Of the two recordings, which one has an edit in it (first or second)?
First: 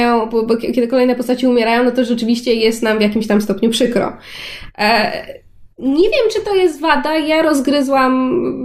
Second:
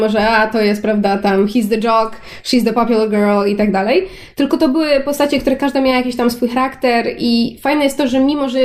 first